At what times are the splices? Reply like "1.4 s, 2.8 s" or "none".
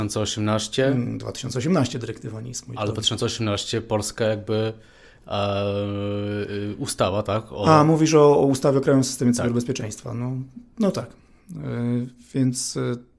none